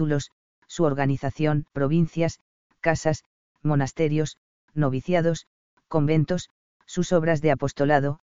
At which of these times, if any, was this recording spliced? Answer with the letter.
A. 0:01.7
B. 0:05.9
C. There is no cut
A